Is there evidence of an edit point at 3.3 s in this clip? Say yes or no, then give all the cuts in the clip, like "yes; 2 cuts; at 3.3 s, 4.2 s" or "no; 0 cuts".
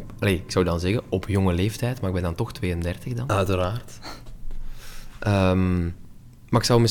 yes; 1 cut; at 3.3 s